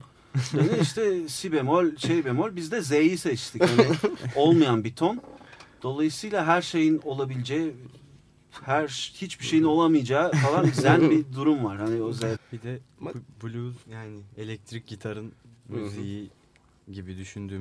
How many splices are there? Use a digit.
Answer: 2